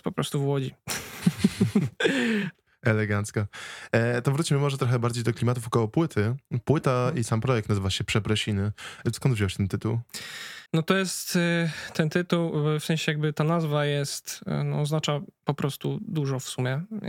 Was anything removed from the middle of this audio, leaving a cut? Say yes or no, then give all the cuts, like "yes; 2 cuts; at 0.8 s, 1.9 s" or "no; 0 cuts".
yes; 2 cuts; at 9.1 s, 10.7 s